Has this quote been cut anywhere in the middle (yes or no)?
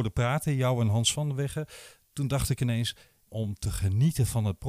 yes